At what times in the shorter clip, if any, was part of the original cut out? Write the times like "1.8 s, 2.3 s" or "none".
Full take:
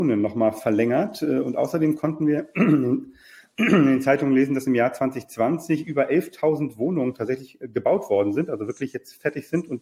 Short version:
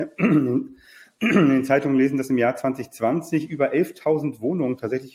none